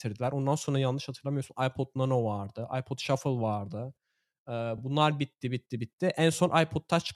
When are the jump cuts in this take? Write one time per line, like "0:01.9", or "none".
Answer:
none